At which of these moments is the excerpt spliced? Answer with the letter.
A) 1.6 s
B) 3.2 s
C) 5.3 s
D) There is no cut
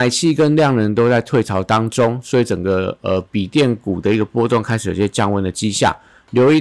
D